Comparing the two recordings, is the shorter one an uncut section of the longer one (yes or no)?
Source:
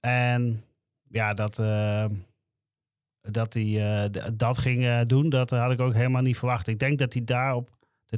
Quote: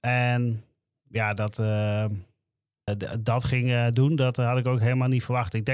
no